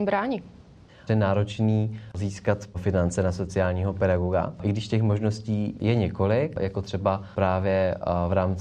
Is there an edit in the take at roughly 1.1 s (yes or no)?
yes